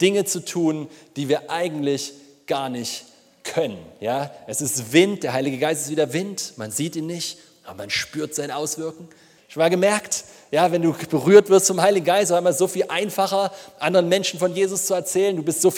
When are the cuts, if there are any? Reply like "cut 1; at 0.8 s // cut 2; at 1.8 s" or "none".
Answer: cut 1; at 9.4 s